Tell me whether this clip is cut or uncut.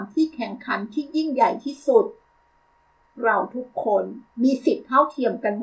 cut